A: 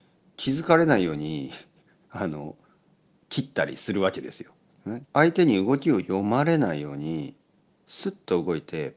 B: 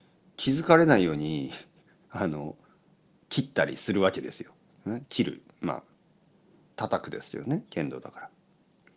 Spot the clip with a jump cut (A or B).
A